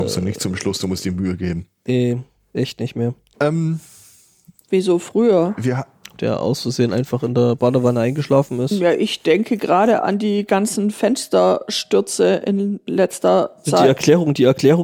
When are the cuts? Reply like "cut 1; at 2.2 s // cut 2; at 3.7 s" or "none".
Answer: cut 1; at 3.3 s // cut 2; at 6.2 s